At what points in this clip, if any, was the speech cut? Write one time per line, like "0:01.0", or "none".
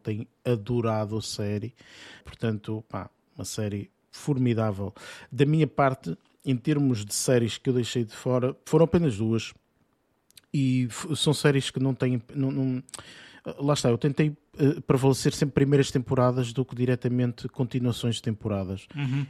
0:02.2